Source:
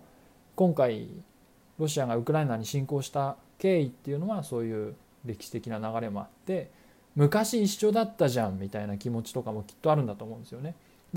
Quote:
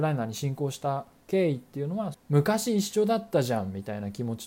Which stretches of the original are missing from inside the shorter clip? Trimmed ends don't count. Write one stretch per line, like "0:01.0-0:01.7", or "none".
0:04.4-0:07.0

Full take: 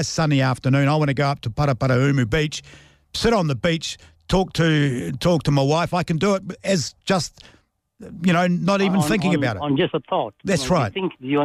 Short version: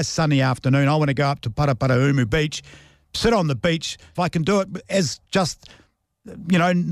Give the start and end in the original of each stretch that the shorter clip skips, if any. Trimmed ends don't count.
0:04.1-0:05.9

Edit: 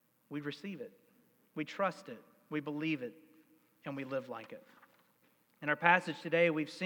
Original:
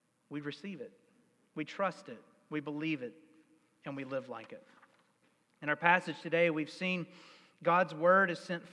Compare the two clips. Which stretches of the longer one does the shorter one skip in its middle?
none

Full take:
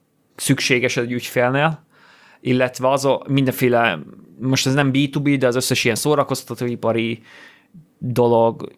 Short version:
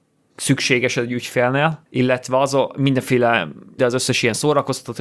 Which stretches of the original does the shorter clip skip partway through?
0:01.9-0:02.4
0:04.3-0:05.4

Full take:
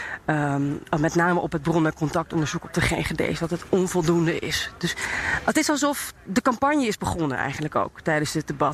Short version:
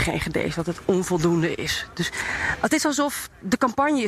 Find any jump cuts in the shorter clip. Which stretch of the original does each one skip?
none

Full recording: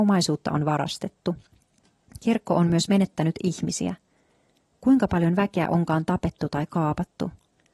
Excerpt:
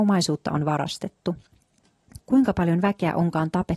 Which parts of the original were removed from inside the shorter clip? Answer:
0:02.2-0:04.7

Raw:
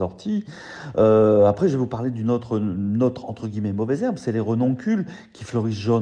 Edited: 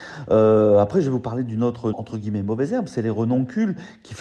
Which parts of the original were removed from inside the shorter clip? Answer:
0:02.6-0:03.2

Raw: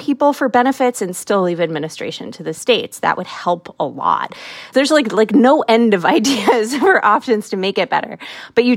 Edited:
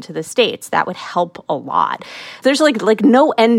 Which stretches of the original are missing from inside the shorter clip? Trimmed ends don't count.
none

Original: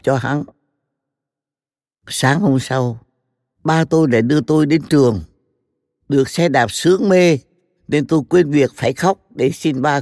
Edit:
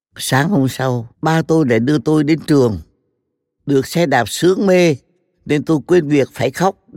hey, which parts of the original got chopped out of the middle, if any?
0:03.0-0:03.5

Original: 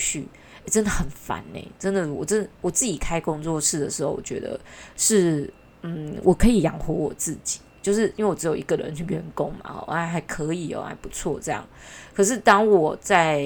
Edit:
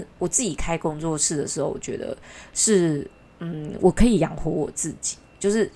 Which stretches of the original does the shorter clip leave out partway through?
none

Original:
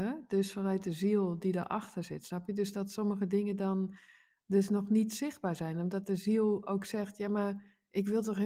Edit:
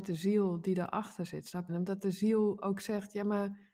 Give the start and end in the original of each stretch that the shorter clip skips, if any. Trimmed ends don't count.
0:02.5-0:05.7

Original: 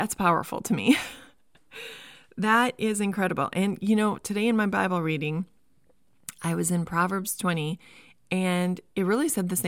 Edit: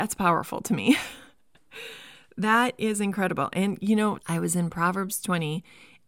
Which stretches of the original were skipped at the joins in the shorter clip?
0:04.2-0:06.3

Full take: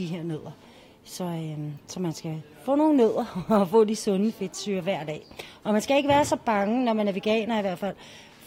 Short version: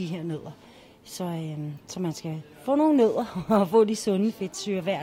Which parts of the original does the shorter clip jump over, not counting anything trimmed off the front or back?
none

